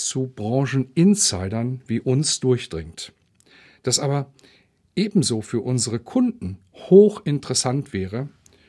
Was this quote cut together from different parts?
no; 0 cuts

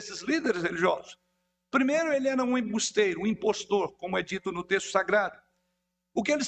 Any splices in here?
no; 0 cuts

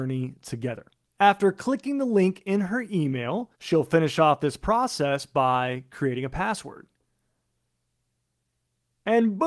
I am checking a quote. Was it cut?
yes; 2 cuts; at 1.0 s, 3.5 s

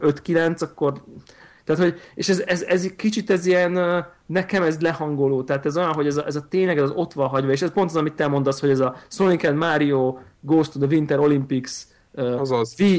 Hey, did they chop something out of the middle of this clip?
no; 0 cuts

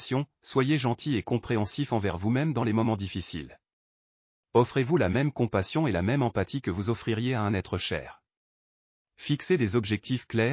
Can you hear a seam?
no; 0 cuts

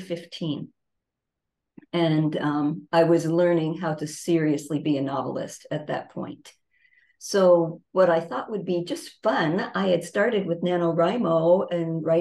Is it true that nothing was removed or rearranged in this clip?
yes; 0 cuts

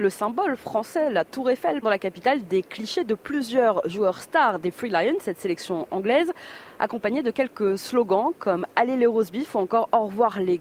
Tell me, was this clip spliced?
yes; 1 cut; at 1.8 s

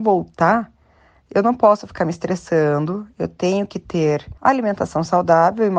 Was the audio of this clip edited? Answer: yes; 1 cut; at 4.4 s

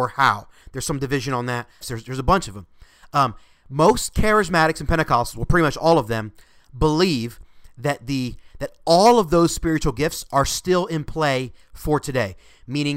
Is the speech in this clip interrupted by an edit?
yes; 1 cut; at 1.8 s

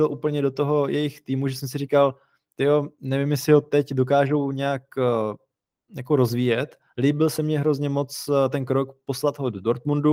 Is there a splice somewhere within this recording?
no; 0 cuts

